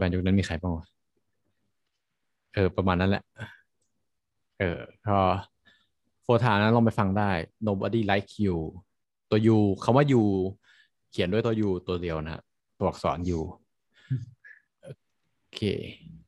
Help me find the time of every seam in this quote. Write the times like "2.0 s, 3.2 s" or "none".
none